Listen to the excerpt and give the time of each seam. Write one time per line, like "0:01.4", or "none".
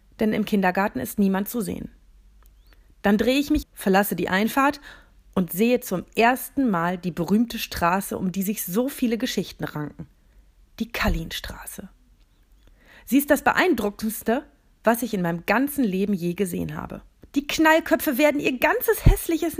0:03.6
0:17.2